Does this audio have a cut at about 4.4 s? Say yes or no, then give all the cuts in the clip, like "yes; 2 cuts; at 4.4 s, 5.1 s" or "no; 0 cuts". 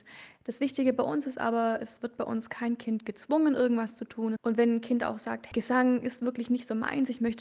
yes; 2 cuts; at 4.4 s, 5.5 s